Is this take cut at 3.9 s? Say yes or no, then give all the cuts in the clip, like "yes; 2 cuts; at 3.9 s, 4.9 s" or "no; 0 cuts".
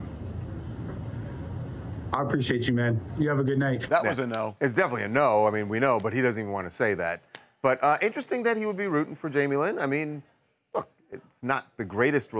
yes; 1 cut; at 3.9 s